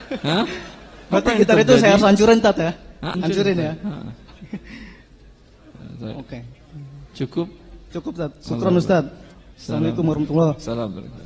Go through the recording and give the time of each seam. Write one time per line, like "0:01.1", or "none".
0:03.1